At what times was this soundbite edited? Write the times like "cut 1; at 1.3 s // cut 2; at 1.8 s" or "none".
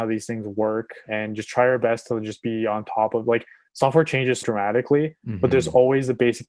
cut 1; at 1.1 s // cut 2; at 4.4 s